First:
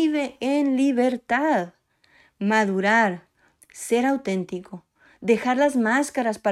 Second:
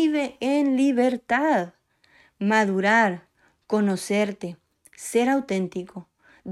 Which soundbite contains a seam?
first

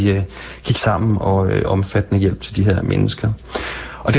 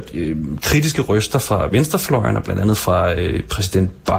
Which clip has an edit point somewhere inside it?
first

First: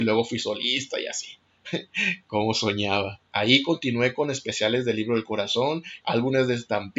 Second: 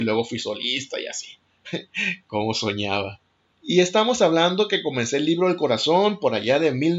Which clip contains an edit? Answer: first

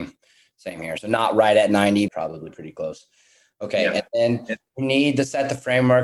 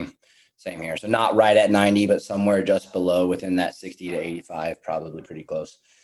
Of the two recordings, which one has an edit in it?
first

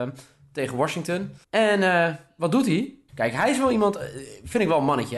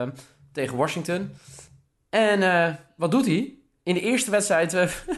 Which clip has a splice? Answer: first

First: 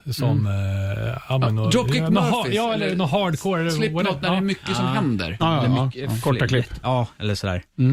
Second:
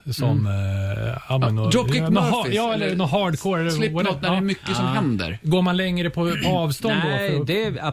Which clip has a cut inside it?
first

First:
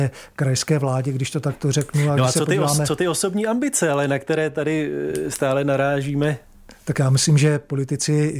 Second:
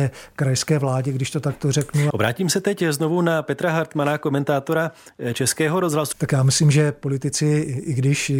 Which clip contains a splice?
second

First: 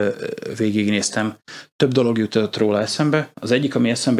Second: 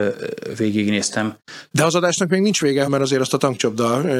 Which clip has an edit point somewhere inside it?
second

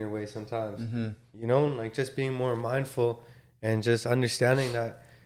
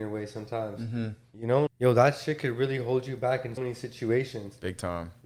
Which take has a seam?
second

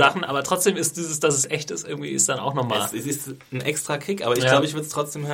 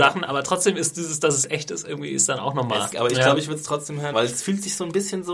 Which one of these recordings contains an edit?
second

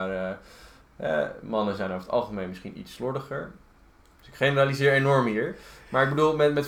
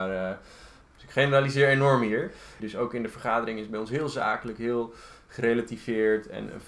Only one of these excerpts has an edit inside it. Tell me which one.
second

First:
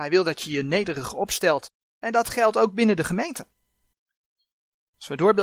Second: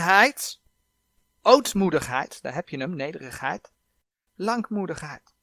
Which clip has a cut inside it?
second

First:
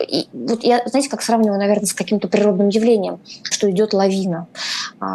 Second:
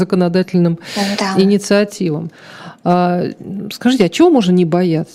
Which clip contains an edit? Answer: first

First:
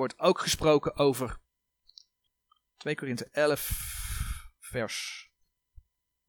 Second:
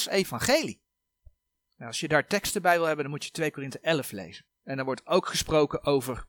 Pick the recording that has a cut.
second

